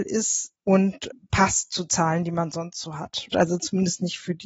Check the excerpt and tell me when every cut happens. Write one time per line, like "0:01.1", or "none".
0:03.3